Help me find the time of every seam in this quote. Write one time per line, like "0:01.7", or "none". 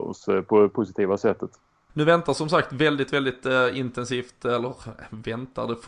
0:01.9